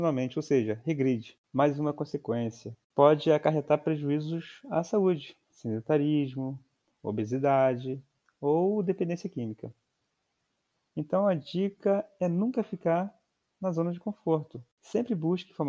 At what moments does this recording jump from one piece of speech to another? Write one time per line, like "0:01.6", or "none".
0:10.9